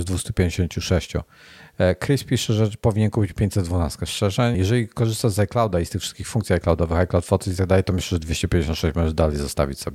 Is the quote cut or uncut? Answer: cut